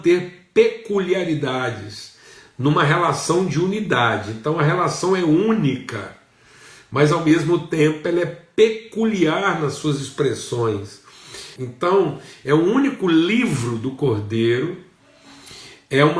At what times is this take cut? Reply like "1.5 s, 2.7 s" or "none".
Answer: 11.6 s